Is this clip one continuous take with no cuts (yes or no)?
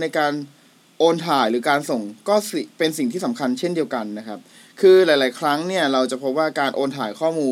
yes